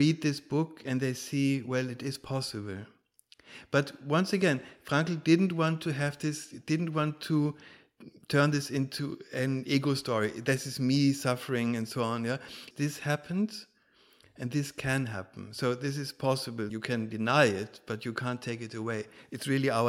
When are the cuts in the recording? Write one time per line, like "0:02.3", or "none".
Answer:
0:12.7
0:16.7